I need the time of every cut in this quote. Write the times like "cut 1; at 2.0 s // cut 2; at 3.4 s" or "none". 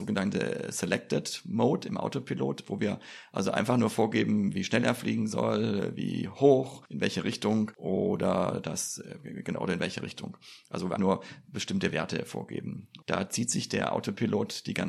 cut 1; at 11.0 s // cut 2; at 13.0 s